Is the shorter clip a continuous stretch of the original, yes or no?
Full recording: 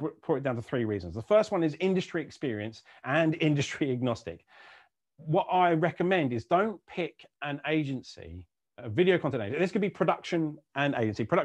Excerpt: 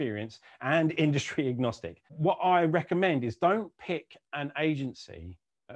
no